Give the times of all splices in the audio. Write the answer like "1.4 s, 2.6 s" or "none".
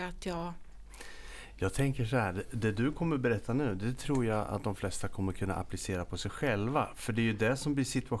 none